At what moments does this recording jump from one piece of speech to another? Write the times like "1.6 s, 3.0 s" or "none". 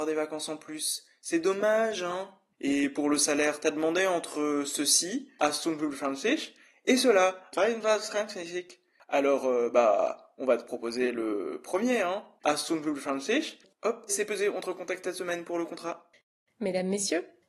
14.1 s